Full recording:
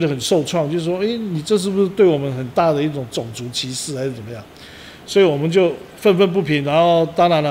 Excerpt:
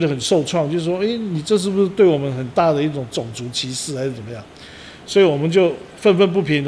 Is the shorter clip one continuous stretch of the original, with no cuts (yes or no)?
yes